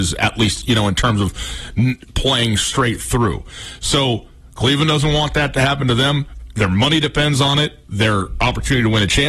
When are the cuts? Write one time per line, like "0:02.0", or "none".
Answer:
none